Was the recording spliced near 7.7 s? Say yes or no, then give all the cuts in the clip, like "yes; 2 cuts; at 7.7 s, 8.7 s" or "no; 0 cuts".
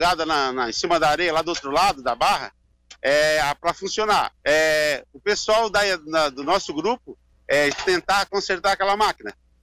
yes; 2 cuts; at 4.4 s, 7.7 s